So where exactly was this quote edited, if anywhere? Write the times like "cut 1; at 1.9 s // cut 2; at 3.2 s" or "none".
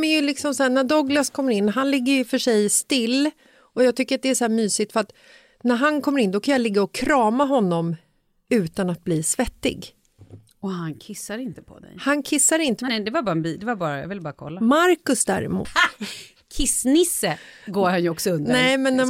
cut 1; at 12.9 s // cut 2; at 15.6 s

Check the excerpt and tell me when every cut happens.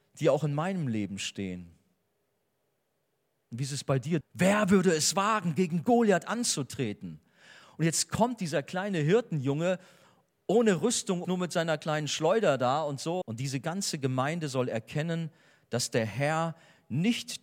cut 1; at 4.2 s // cut 2; at 11.2 s // cut 3; at 13.2 s

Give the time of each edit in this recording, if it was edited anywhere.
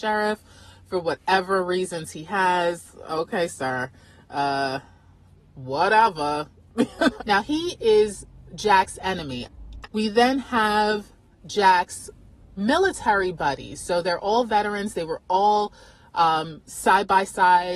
cut 1; at 7.2 s // cut 2; at 9.8 s

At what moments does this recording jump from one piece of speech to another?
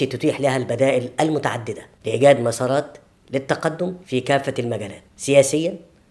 cut 1; at 4.0 s

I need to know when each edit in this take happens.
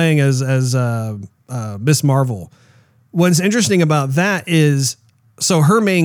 none

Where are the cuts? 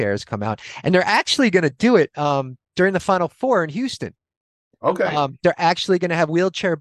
none

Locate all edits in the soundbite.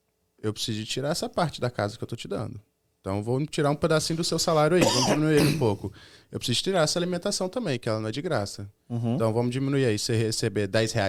none

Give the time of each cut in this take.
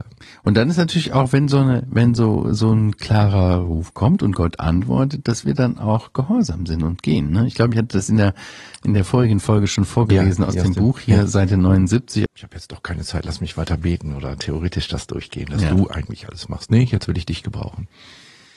cut 1; at 12.3 s

